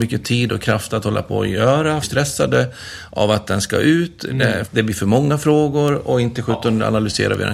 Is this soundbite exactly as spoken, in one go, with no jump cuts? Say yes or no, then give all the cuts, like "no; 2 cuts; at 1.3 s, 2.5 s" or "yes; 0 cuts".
no; 2 cuts; at 2.0 s, 4.7 s